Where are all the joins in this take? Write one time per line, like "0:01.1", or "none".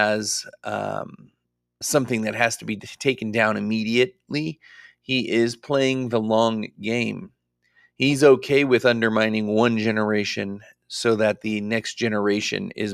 0:01.8